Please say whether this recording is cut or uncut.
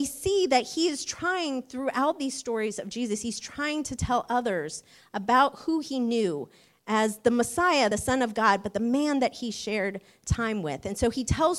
uncut